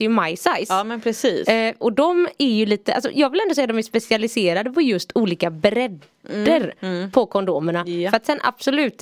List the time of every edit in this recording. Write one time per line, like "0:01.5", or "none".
none

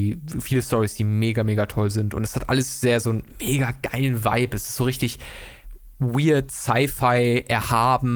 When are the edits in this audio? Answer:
none

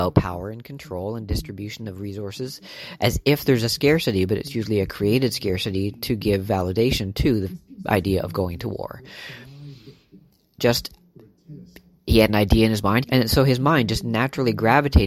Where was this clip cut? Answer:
0:10.6
0:13.0

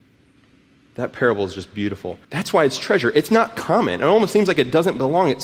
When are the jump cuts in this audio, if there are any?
0:02.2

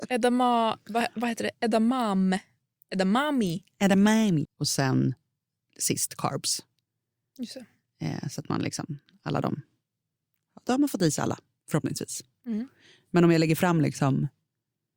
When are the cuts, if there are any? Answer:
0:04.5

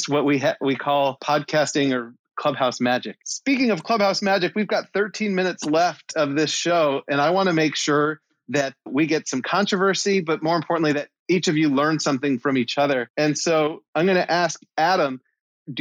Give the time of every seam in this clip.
none

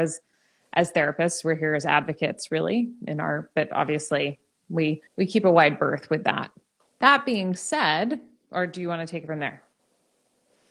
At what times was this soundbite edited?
0:05.1

